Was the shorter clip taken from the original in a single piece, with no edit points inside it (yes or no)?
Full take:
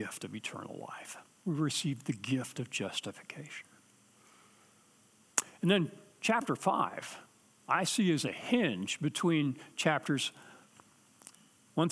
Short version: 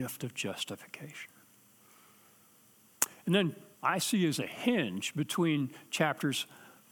no